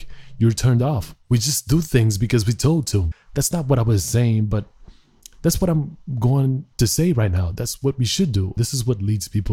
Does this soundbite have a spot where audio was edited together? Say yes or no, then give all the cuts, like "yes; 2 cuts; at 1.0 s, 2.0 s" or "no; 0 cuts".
yes; 3 cuts; at 3.1 s, 6.7 s, 8.6 s